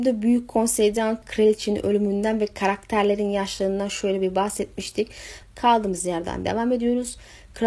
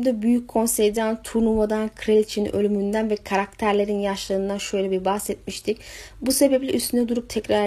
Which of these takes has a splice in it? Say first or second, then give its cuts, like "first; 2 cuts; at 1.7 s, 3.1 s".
first; 2 cuts; at 1.2 s, 5.4 s